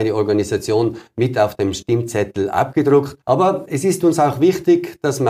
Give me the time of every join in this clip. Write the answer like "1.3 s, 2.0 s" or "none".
3.2 s